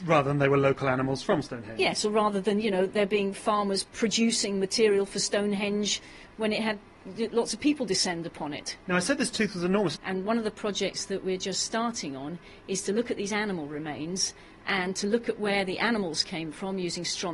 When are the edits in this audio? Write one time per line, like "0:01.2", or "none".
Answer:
0:10.0